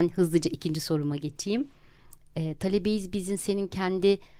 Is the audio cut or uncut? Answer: uncut